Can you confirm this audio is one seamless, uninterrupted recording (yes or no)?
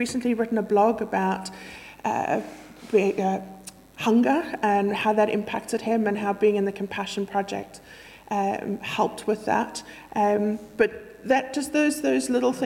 no